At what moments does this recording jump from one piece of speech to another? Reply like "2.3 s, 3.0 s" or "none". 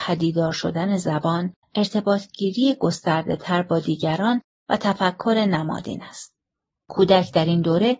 1.6 s